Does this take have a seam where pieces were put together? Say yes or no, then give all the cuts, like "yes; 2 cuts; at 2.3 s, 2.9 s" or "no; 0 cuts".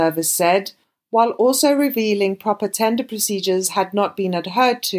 no; 0 cuts